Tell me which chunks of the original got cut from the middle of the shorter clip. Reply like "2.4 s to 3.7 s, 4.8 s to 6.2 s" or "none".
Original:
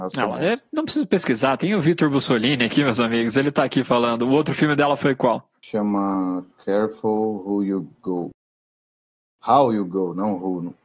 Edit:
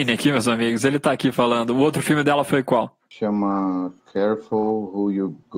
none